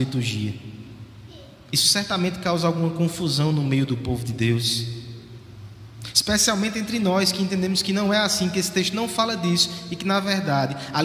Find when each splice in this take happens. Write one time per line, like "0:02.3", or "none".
none